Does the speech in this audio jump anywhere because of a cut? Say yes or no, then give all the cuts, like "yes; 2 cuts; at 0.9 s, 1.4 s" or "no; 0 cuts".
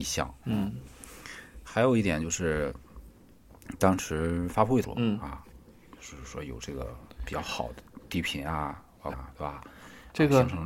yes; 2 cuts; at 4.8 s, 9.1 s